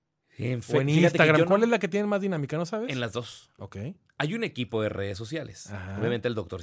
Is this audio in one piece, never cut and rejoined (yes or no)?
yes